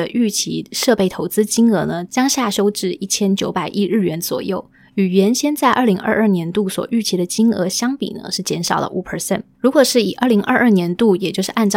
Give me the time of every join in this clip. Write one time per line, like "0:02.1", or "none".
none